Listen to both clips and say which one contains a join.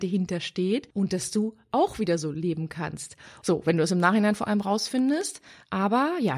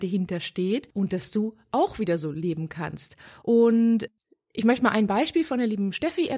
first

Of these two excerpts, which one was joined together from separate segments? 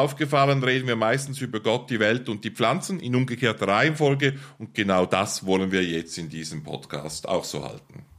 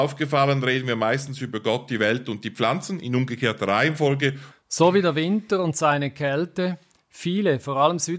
second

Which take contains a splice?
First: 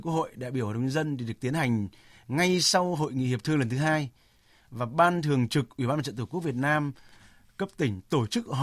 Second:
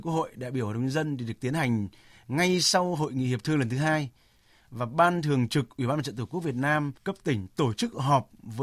second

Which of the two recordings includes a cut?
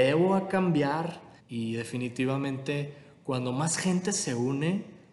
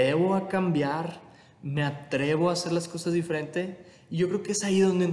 first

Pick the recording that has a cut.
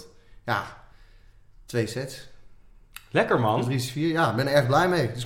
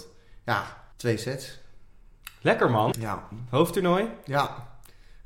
second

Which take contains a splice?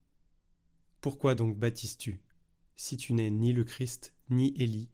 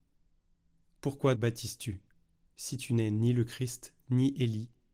second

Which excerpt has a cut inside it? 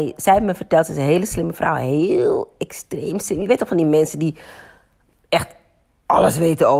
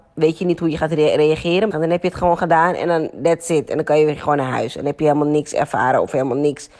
second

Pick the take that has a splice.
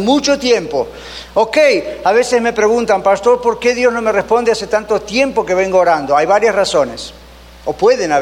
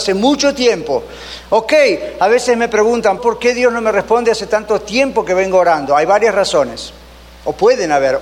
second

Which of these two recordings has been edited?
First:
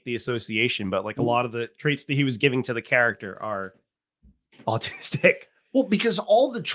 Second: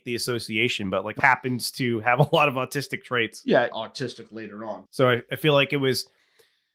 second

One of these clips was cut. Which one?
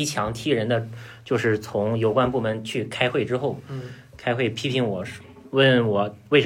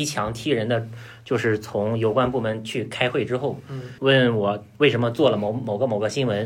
second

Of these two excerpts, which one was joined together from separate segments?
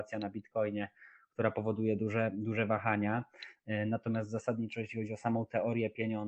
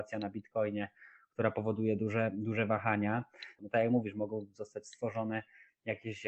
second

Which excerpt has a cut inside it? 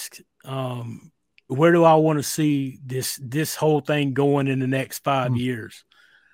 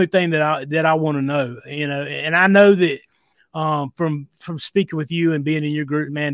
first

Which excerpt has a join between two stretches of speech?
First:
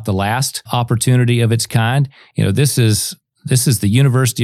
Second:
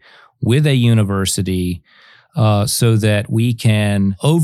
first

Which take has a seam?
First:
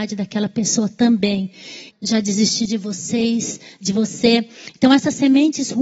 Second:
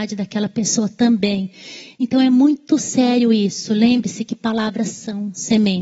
first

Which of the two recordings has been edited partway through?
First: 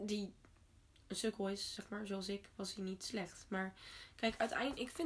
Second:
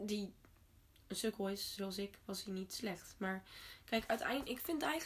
second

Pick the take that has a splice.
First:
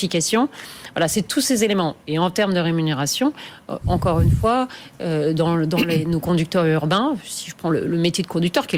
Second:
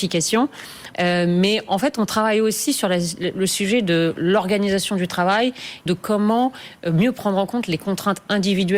second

